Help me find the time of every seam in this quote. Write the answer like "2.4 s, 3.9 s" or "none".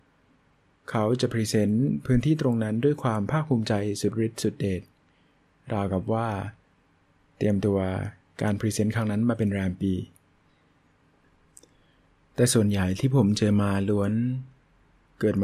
none